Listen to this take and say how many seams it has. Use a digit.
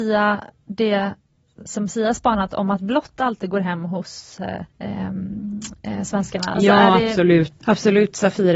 3